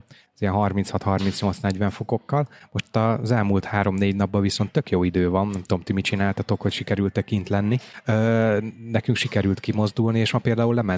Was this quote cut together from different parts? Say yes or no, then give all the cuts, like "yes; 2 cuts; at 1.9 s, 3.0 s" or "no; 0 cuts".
no; 0 cuts